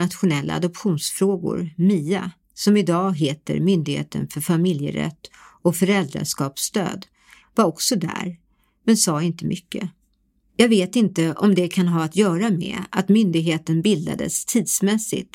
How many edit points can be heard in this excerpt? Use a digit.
2